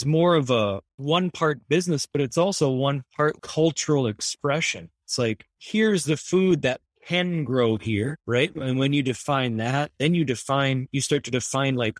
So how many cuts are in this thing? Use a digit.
0